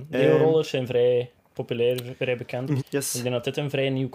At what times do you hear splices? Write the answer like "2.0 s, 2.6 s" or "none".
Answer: 2.8 s